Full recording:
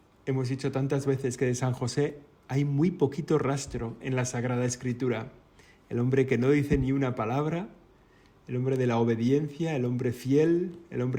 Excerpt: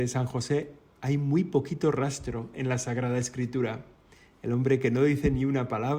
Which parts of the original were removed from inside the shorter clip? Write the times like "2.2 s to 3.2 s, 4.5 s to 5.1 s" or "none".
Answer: none